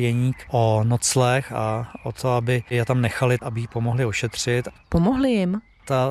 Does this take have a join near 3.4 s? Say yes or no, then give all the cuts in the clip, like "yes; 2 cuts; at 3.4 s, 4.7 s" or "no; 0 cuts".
yes; 1 cut; at 3.4 s